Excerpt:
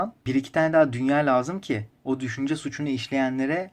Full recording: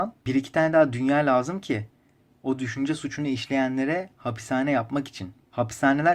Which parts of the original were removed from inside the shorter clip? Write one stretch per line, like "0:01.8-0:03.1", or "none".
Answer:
0:02.0-0:02.4